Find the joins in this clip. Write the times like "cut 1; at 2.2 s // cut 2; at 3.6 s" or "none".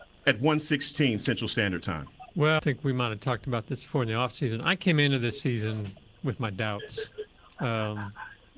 cut 1; at 2.6 s